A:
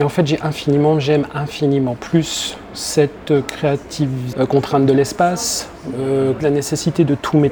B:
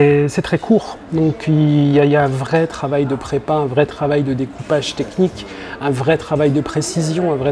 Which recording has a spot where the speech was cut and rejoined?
A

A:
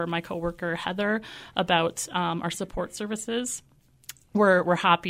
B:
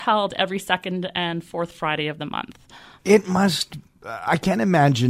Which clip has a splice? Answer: B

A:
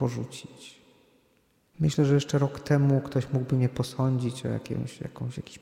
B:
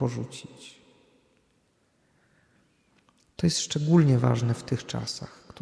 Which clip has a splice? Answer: A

